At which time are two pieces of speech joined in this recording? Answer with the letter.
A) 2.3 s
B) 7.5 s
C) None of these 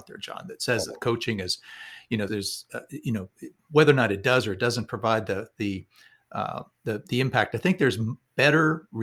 A